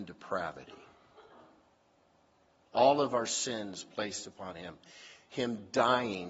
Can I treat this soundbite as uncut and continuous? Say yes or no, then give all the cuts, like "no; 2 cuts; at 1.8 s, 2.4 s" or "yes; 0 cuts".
yes; 0 cuts